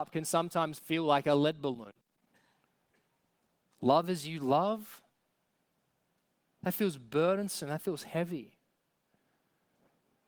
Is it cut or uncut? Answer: uncut